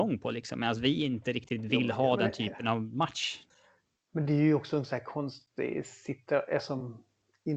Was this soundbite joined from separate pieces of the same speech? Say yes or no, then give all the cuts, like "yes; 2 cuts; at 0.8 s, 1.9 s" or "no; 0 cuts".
no; 0 cuts